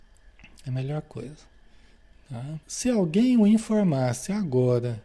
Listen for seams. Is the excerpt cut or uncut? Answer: cut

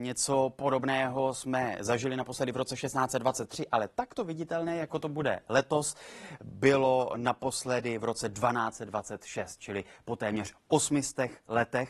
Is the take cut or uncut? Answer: uncut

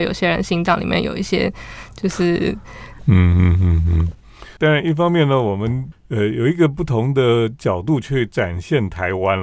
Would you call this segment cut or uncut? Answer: cut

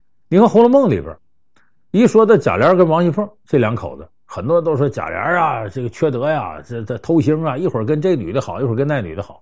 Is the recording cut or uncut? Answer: uncut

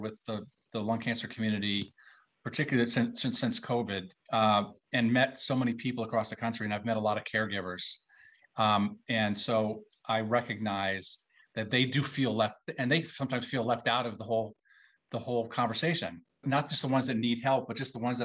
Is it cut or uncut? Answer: cut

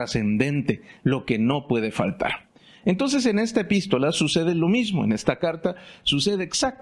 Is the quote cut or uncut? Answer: uncut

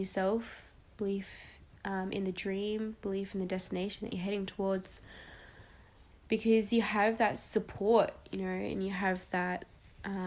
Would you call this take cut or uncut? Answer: uncut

